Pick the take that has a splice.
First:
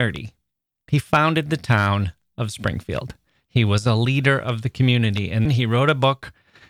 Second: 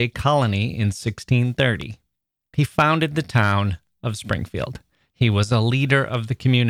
first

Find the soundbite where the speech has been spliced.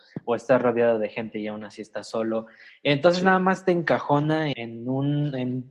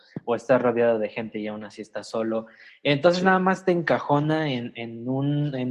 first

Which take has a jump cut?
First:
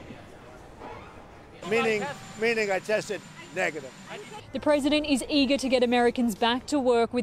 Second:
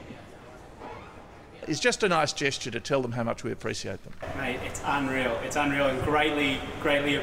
first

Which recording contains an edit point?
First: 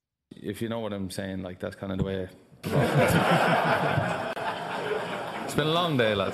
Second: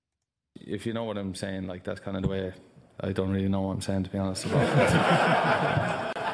first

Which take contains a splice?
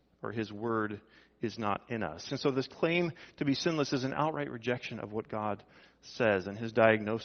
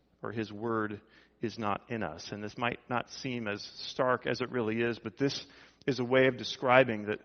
first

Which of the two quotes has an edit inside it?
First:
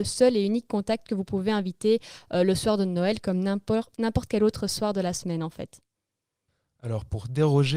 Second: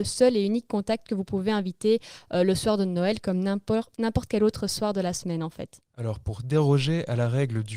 second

